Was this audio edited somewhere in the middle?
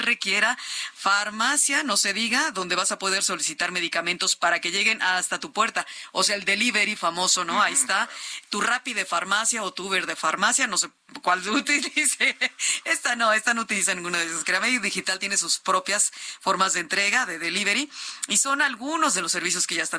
no; 0 cuts

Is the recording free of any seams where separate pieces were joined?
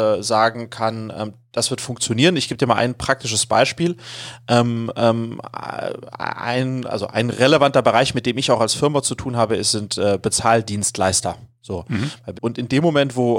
no; 1 cut; at 12.3 s

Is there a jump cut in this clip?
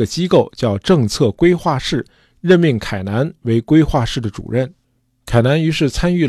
no; 0 cuts

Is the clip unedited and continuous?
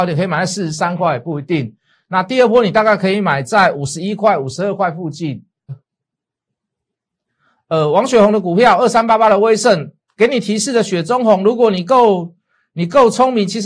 no; 1 cut; at 5.7 s

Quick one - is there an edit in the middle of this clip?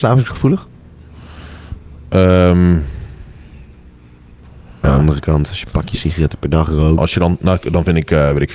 yes; 2 cuts; at 4.8 s, 7.0 s

